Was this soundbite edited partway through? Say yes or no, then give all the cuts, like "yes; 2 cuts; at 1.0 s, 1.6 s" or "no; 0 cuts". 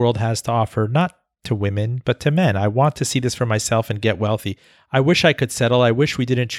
no; 0 cuts